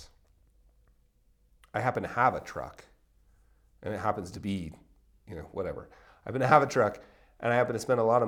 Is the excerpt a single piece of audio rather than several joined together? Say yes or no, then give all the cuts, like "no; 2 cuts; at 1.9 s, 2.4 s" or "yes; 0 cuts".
yes; 0 cuts